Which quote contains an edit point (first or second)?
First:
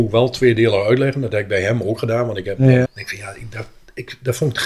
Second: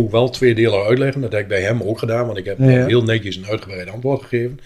first